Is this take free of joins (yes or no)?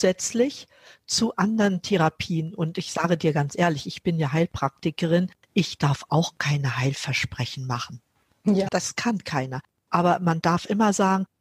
no